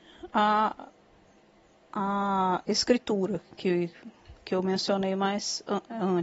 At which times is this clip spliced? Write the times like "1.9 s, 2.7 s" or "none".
none